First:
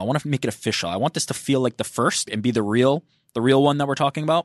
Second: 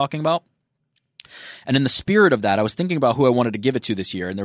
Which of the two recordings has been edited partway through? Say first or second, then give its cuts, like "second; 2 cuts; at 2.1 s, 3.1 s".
first; 1 cut; at 2.3 s